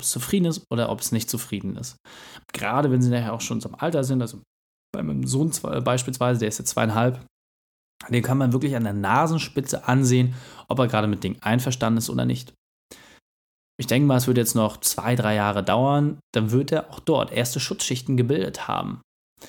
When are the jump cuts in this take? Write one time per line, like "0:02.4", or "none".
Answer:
0:02.4